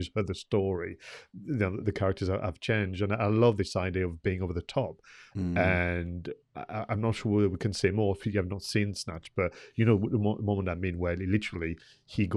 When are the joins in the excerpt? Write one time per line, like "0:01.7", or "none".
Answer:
0:01.8
0:05.3